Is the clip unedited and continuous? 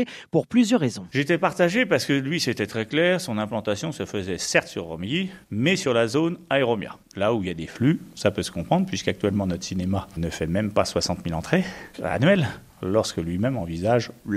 yes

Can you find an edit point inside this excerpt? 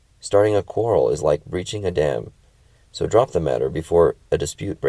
no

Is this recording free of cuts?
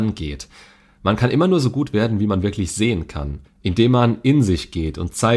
no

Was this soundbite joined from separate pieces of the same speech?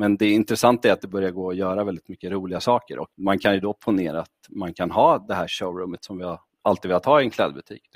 yes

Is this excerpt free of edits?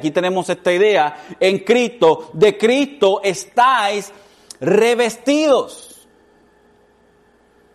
yes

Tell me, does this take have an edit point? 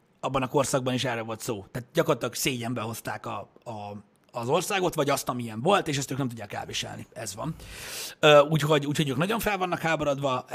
no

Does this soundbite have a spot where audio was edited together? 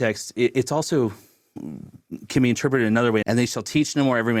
yes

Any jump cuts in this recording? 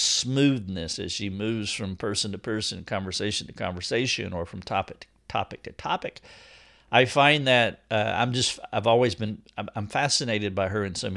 no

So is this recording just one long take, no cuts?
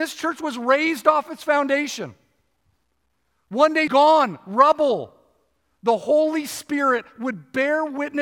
no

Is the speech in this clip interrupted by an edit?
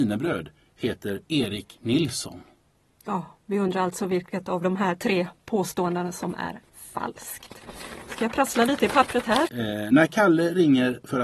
yes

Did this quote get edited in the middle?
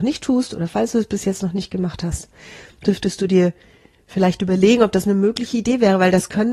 no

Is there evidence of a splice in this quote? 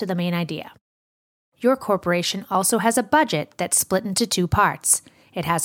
no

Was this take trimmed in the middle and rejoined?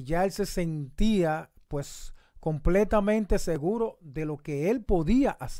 no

